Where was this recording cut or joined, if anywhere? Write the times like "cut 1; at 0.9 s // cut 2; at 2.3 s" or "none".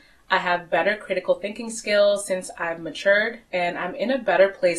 none